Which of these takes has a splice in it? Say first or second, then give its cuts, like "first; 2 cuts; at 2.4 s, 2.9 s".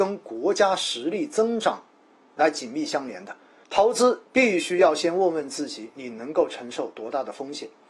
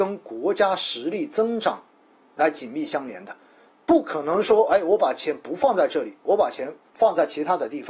first; 1 cut; at 3.6 s